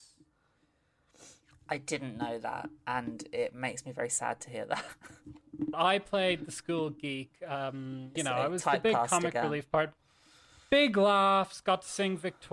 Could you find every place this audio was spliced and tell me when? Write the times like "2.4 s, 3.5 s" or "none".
5.7 s, 8.2 s

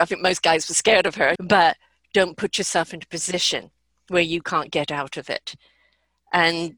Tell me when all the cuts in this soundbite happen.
1.4 s

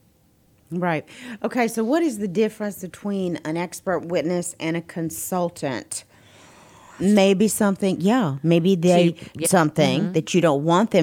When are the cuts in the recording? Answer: 7.0 s, 9.4 s

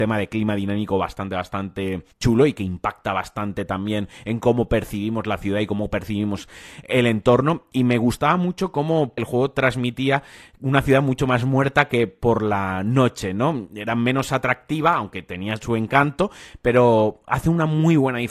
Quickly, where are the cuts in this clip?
2.1 s, 9.2 s

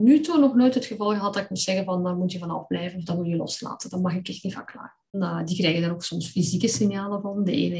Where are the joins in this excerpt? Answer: 5.1 s

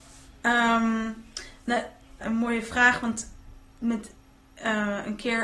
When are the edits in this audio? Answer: 2.2 s

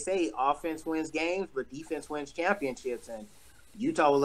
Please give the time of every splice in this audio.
none

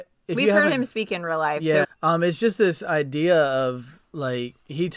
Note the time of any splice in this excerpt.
1.8 s

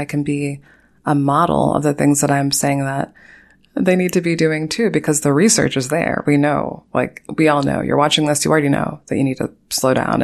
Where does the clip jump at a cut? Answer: none

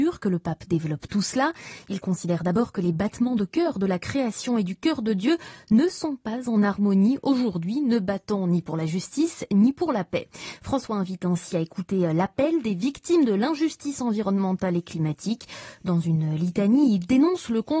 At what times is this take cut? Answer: none

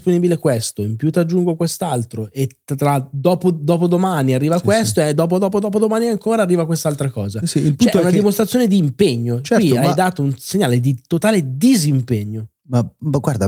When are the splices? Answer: none

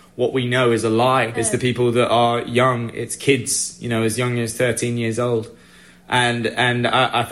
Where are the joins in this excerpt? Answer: 1.3 s

